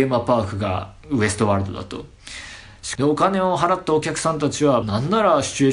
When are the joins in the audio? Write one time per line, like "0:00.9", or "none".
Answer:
0:03.0
0:04.8